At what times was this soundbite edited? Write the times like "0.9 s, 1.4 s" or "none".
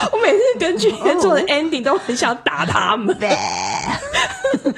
none